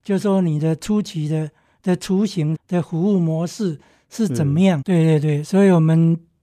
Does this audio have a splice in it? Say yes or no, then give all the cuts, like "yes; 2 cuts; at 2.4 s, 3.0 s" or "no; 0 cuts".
yes; 2 cuts; at 2.5 s, 4.8 s